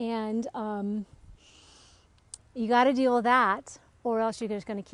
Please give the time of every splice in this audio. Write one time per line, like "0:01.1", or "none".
0:02.4

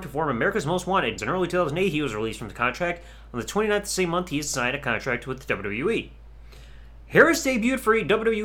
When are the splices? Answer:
0:01.2

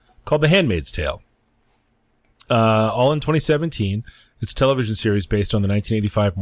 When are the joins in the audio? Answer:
none

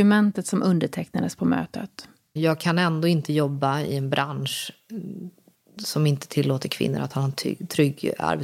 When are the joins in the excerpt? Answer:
0:02.4

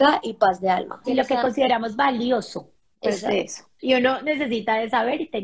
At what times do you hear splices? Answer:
0:01.0
0:03.8

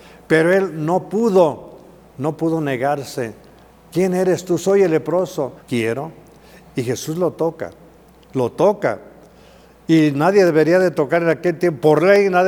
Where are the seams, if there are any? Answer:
0:05.6

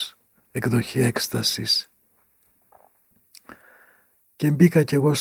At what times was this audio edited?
none

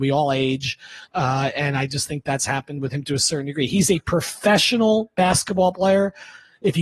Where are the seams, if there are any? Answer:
none

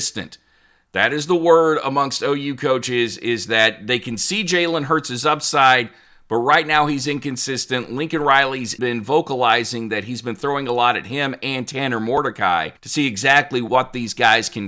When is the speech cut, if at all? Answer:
0:08.8
0:12.8

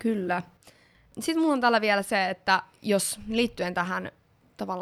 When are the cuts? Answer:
none

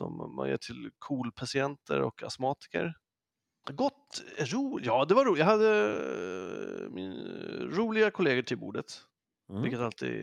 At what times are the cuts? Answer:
0:03.6

